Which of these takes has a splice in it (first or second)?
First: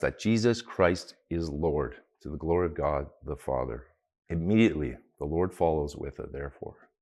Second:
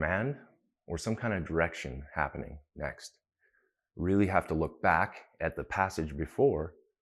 first